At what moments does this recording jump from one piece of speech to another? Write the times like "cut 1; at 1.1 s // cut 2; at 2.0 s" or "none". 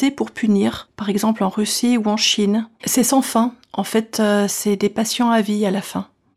cut 1; at 2.8 s